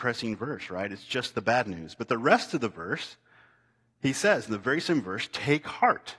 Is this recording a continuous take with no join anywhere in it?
yes; 0 cuts

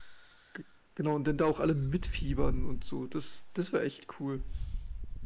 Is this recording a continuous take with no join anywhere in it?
yes; 0 cuts

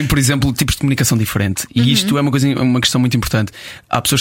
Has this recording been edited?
no; 0 cuts

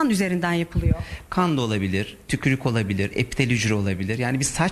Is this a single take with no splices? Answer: yes; 0 cuts

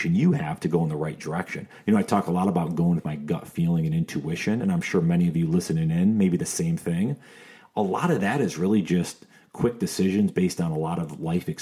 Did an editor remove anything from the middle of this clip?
no; 0 cuts

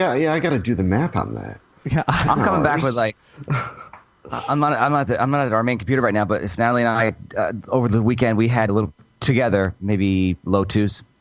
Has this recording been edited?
yes; 1 cut; at 8.7 s

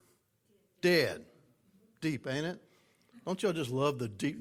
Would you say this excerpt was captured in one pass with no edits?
yes; 0 cuts

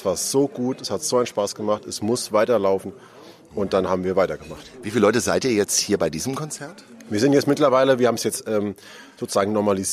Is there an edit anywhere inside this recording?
no; 0 cuts

